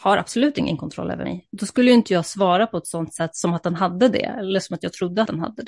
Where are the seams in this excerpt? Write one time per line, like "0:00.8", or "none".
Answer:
none